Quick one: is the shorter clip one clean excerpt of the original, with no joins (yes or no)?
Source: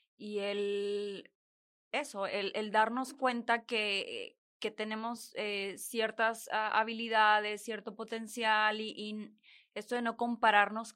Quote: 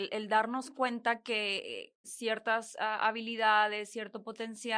no